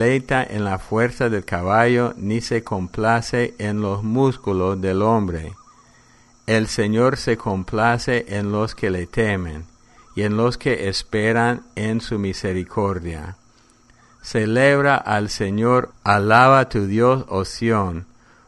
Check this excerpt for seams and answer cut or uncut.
cut